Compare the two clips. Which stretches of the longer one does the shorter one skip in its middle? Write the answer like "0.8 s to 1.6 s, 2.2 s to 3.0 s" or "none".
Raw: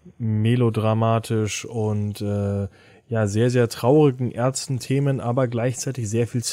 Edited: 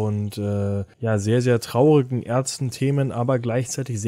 2.8 s to 3.0 s

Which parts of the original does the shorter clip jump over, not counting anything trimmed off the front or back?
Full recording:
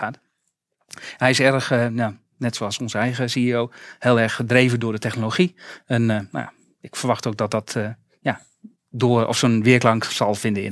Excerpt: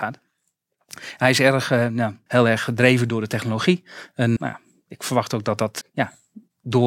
2.3 s to 4.0 s, 6.1 s to 6.3 s, 7.7 s to 8.1 s

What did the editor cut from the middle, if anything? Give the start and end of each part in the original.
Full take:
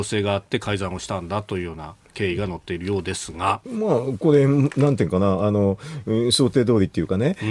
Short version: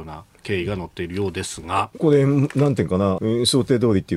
3.7 s to 4.2 s, 5.4 s to 6.0 s

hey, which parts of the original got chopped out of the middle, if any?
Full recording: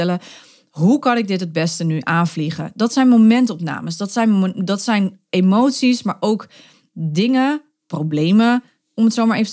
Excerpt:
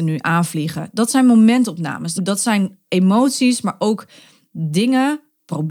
4.0 s to 4.6 s

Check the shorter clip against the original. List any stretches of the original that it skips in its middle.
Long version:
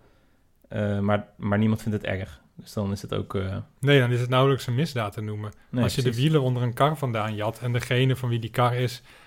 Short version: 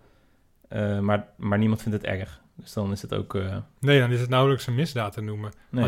none

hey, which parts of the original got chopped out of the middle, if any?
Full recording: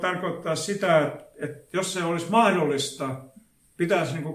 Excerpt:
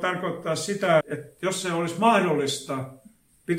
1.0 s to 1.3 s

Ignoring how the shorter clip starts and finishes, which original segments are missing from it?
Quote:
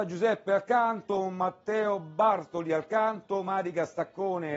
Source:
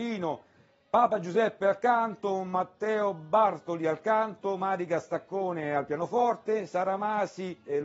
none

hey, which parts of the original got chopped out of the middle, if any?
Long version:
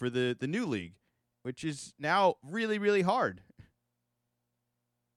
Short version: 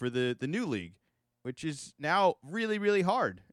none

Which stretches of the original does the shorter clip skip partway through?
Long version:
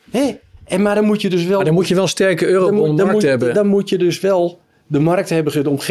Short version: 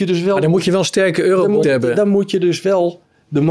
2.9 s to 3.2 s

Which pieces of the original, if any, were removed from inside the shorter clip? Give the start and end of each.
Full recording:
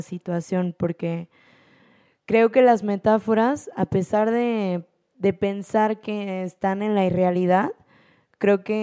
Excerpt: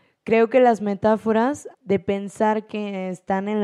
3.7 s to 5.0 s

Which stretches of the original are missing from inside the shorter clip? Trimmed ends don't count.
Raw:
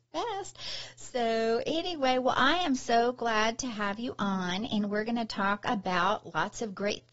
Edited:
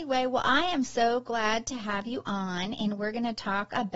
none

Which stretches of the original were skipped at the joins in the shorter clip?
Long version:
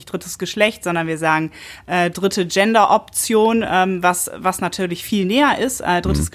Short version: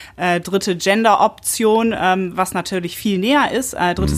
4.0 s to 4.4 s

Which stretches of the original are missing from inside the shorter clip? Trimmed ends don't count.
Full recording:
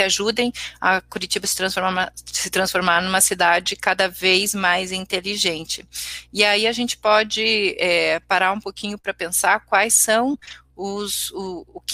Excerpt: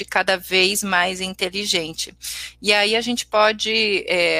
none

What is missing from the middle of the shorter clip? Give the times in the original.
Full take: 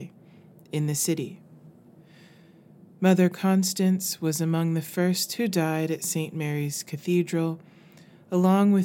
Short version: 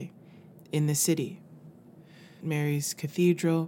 2.4 s to 6.3 s

